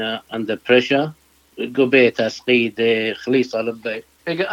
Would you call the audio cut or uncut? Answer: uncut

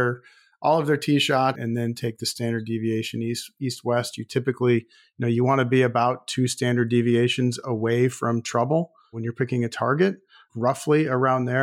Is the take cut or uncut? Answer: cut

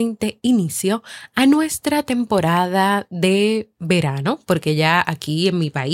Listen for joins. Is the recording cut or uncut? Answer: uncut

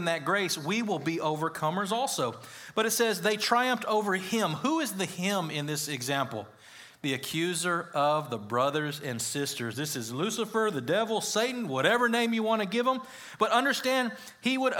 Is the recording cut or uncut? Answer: uncut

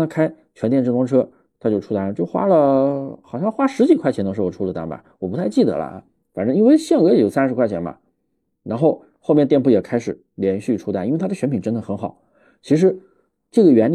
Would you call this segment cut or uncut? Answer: uncut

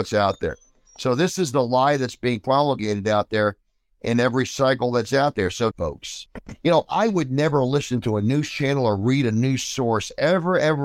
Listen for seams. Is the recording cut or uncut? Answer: cut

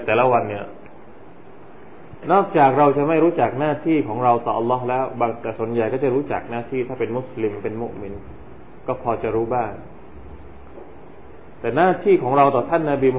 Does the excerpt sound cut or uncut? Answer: uncut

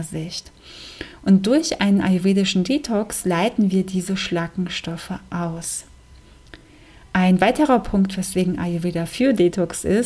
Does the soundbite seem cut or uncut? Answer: uncut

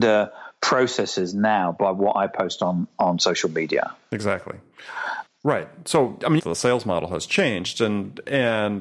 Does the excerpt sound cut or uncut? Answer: cut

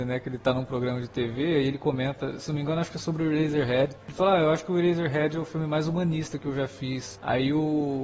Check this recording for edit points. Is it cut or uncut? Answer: uncut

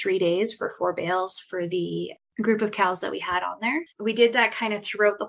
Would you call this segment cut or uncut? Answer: cut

